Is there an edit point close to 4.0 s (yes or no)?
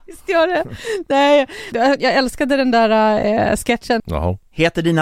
yes